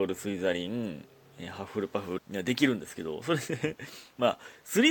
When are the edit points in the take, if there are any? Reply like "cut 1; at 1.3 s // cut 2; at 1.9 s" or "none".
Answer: cut 1; at 2.2 s